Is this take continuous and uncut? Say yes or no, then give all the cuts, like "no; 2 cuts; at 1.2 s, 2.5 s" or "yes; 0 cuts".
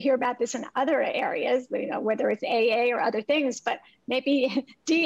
yes; 0 cuts